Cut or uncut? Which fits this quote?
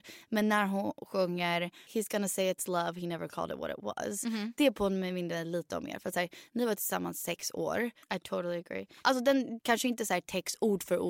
cut